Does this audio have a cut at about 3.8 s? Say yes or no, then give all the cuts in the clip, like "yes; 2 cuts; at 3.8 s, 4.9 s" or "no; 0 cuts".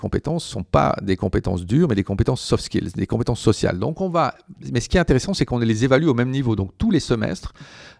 no; 0 cuts